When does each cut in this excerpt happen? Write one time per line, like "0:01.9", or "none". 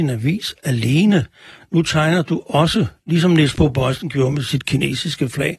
none